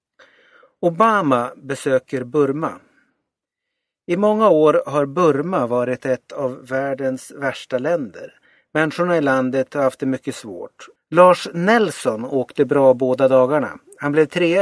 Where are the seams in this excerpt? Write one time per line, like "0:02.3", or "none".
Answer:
0:11.0